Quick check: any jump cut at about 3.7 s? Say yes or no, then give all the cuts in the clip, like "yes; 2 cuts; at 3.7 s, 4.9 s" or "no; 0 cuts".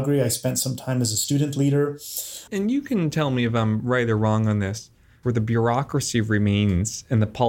no; 2 cuts; at 2.5 s, 5.2 s